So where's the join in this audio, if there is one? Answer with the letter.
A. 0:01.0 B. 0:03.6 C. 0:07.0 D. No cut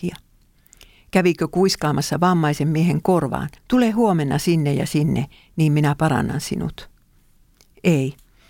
B